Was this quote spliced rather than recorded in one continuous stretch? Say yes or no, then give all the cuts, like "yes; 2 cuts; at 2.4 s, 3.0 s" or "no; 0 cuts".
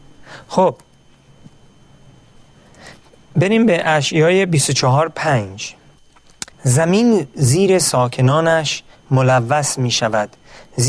yes; 1 cut; at 6.5 s